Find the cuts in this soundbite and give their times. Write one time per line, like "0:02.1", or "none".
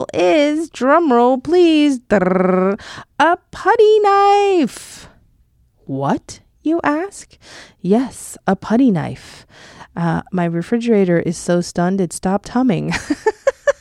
none